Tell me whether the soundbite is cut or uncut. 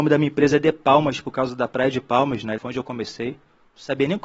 cut